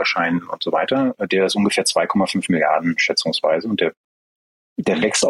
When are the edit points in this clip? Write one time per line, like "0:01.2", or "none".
none